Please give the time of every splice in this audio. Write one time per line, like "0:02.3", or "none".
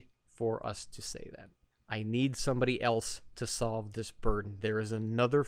0:01.7

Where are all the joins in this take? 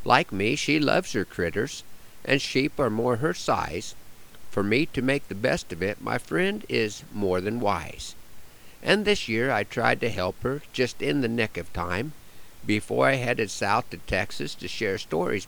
none

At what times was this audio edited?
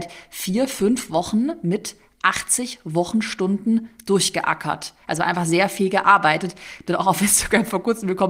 none

